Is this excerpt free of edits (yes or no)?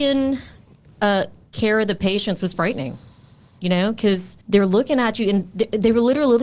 no